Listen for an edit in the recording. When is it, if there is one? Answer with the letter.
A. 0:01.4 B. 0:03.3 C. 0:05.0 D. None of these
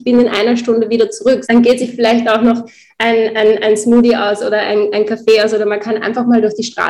A